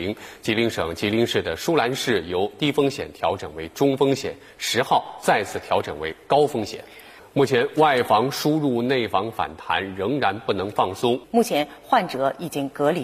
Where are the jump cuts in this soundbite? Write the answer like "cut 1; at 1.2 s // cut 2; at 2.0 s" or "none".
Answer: cut 1; at 7.2 s // cut 2; at 11.2 s